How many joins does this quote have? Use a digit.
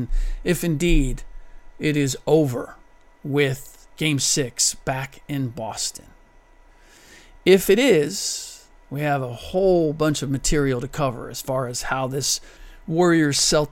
1